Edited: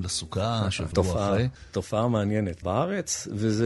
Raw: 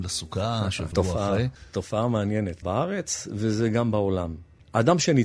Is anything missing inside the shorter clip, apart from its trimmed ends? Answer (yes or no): no